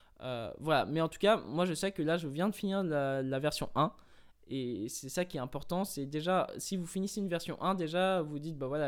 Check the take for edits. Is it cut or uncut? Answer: uncut